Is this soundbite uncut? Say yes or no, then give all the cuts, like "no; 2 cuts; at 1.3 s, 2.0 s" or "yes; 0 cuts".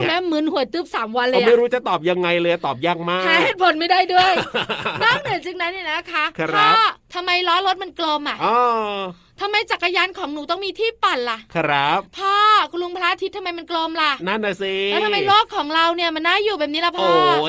yes; 0 cuts